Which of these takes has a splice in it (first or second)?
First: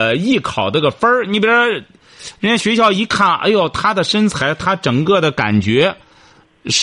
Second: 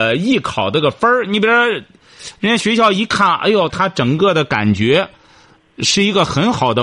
second